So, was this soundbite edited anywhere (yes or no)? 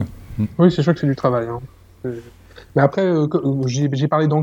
no